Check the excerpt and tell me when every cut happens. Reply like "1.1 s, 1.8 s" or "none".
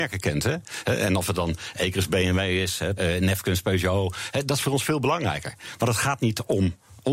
3.0 s